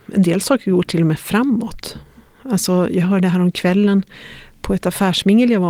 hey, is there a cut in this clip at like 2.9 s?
no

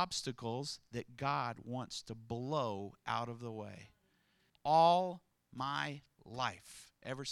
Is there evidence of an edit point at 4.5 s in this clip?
yes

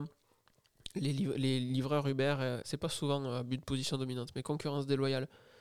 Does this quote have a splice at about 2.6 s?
yes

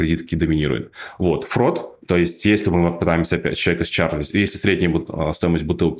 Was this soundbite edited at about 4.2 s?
no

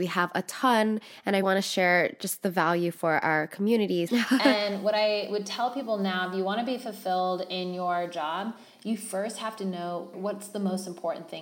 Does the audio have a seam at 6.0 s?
no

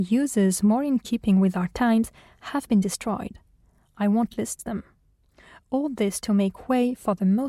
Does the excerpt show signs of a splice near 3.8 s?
no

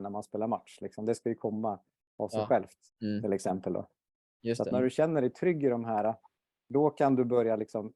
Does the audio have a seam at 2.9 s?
yes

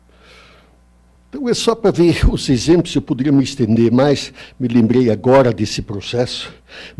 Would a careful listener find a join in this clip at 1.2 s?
yes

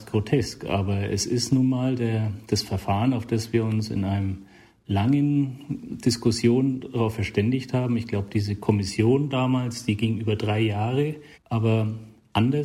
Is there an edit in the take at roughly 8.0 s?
no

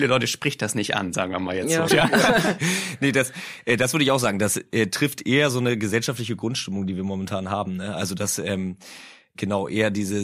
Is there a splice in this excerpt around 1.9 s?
yes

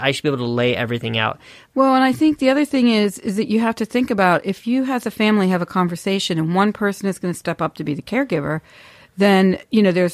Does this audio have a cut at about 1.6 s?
yes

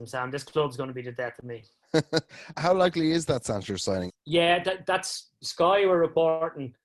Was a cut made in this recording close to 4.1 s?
yes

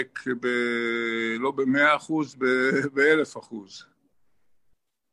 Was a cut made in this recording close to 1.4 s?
no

